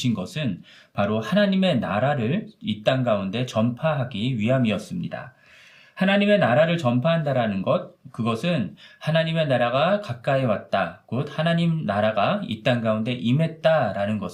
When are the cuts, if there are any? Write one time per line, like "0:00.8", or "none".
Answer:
none